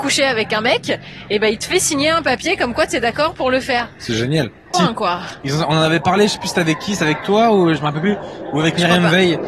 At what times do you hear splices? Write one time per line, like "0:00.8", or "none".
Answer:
0:04.7